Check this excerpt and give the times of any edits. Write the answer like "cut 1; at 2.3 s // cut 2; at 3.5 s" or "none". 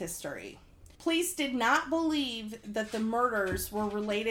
cut 1; at 0.9 s